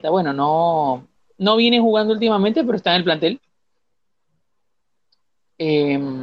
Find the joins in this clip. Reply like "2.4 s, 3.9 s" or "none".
none